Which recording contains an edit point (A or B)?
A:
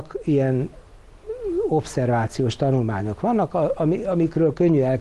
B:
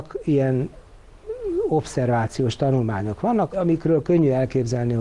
B